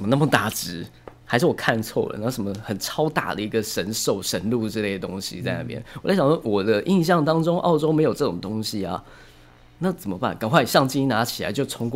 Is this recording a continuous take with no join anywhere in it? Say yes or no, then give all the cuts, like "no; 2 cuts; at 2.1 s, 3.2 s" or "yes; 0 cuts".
yes; 0 cuts